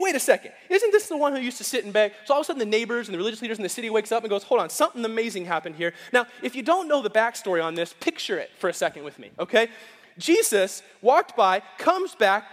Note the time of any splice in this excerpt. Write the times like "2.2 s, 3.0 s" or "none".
none